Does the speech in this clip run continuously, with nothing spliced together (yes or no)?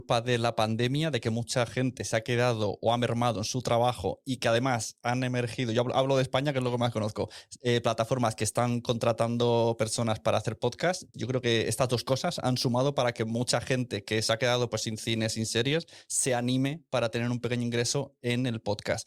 no